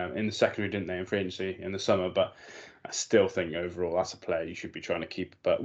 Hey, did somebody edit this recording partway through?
no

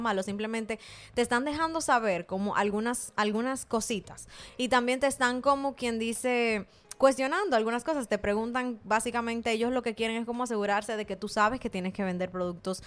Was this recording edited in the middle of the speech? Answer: no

